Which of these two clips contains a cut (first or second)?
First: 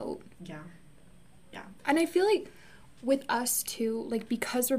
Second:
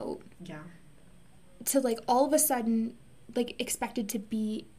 first